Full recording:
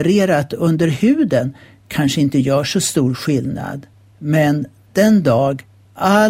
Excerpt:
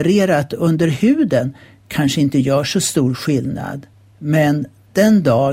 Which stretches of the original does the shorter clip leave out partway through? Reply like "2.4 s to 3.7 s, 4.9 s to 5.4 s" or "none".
none

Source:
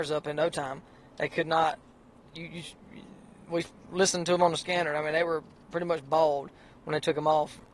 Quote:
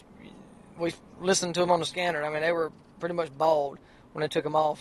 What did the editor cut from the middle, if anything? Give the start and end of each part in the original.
none

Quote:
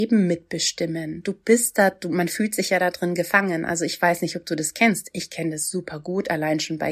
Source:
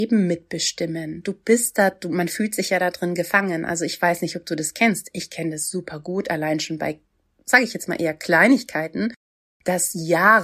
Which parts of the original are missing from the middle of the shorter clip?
none

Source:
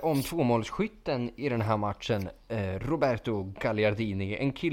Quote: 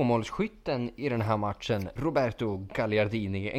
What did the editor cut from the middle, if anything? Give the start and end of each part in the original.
2.4 s to 2.8 s

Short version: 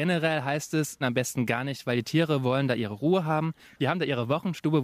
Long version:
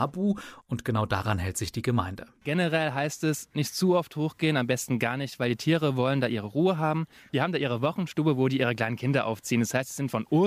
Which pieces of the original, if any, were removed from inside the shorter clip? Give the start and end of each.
3.5 s to 4.5 s

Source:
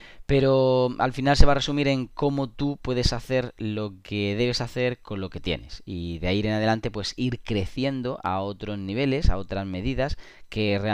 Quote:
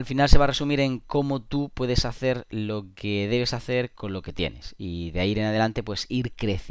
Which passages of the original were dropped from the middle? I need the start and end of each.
none

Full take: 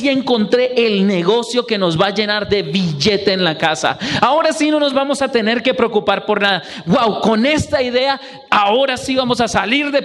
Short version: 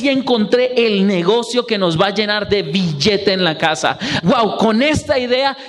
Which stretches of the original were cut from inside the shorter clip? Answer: 4.2 s to 6.8 s

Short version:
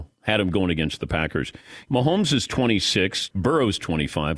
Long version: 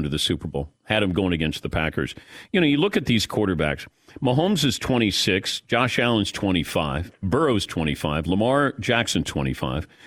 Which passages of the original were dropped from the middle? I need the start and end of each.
2.5 s to 4.2 s, 5.6 s to 7.2 s

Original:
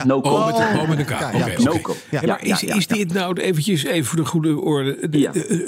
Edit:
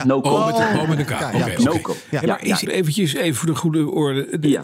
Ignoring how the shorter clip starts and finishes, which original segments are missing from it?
2.7 s to 3.4 s

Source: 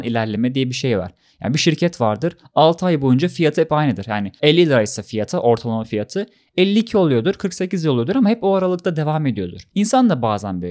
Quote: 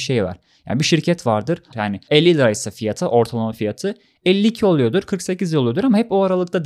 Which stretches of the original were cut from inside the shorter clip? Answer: 2.5 s to 4.0 s

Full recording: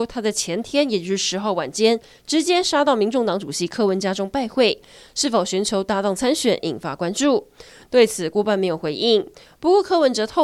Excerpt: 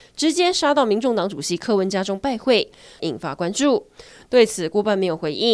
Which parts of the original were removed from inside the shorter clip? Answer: 5.1 s to 6.6 s

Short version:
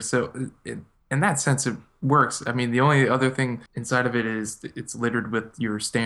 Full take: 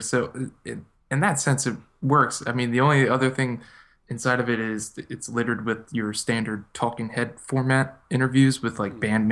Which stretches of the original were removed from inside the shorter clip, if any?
3.7 s to 4.0 s

